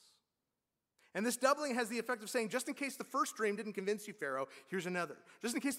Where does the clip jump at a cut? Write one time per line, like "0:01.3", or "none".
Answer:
0:01.0